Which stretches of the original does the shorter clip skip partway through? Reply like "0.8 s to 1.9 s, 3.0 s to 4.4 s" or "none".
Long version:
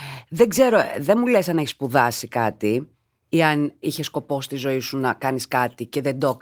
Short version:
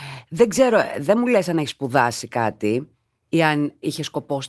none